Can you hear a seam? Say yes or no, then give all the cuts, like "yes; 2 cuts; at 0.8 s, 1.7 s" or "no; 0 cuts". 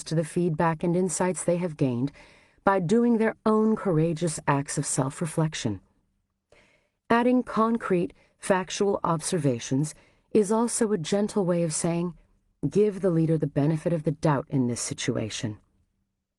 yes; 1 cut; at 12.5 s